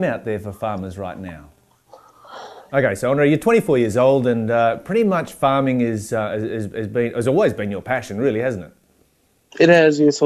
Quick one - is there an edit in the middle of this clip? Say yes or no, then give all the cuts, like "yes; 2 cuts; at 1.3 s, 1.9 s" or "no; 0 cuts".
yes; 1 cut; at 2.7 s